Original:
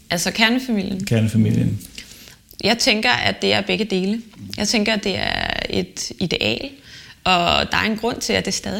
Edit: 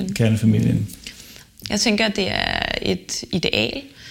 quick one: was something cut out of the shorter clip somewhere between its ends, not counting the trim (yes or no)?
yes